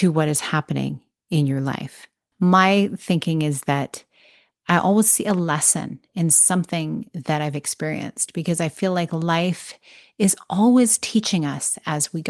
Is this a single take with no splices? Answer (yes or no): no